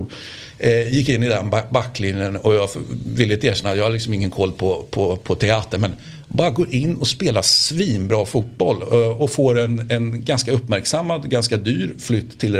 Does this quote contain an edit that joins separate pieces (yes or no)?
no